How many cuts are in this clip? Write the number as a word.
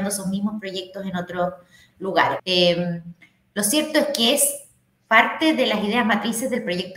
one